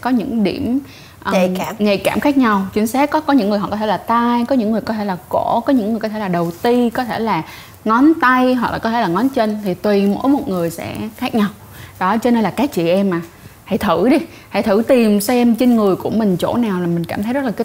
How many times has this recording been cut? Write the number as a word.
zero